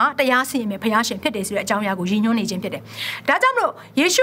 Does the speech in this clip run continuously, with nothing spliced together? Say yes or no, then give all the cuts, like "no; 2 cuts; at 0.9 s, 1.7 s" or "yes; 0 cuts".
yes; 0 cuts